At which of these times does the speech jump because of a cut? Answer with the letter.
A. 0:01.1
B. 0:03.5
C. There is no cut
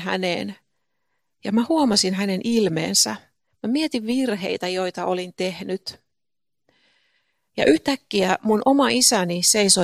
B